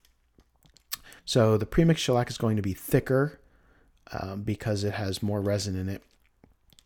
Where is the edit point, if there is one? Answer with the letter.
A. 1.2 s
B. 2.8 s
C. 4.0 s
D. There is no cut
A